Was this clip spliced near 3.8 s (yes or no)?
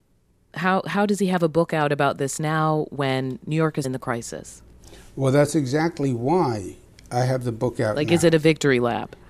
yes